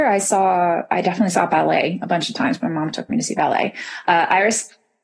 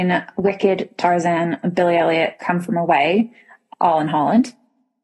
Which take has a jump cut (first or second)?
first